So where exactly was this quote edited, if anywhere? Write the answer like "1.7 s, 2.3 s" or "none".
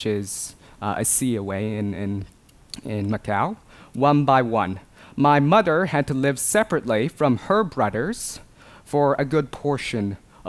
none